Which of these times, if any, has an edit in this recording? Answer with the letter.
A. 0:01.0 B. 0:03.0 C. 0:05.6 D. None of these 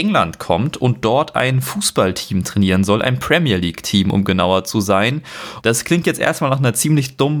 C